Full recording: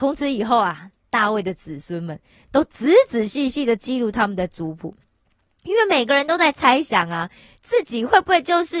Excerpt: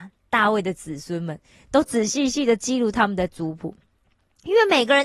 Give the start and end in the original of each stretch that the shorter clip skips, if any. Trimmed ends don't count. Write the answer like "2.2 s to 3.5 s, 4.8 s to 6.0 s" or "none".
2.7 s to 3.1 s